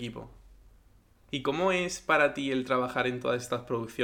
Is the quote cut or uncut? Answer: cut